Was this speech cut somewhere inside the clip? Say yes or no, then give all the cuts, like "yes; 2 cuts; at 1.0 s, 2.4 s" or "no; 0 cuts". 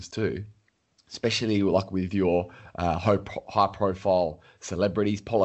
no; 0 cuts